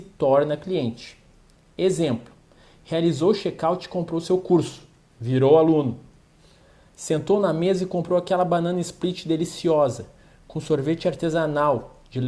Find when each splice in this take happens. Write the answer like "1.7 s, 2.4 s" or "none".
none